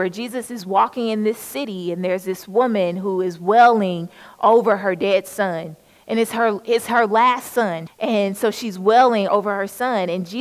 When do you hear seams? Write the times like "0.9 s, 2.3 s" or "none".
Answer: 7.9 s, 9.3 s